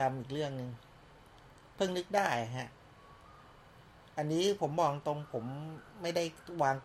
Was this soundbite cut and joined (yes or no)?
no